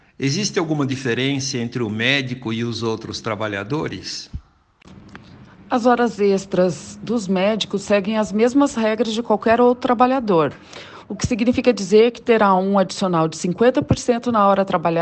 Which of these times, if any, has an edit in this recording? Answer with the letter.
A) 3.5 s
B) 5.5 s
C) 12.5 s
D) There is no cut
D